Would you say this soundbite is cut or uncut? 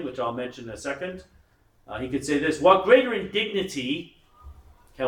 uncut